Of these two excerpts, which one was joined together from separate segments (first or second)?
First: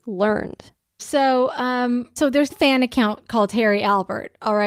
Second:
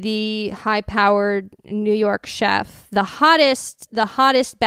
first